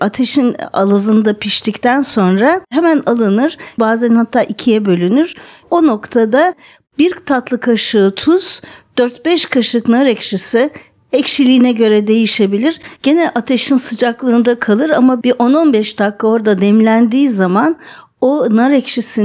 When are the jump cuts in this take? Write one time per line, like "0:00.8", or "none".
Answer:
0:03.8
0:13.0